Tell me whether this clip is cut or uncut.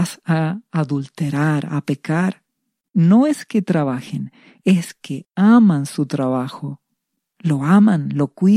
cut